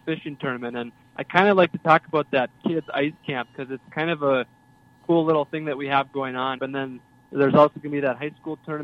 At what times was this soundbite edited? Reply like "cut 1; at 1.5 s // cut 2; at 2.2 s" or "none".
cut 1; at 6.6 s